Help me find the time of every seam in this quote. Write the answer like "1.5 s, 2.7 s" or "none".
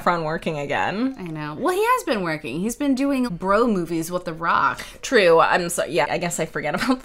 3.3 s, 6.0 s